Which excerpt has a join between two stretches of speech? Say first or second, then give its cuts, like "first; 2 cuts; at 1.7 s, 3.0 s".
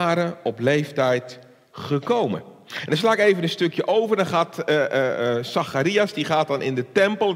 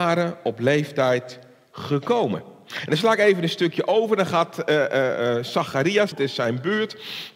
second; 1 cut; at 6.1 s